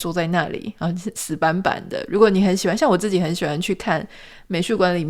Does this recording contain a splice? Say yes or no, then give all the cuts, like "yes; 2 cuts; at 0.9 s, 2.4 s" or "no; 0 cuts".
no; 0 cuts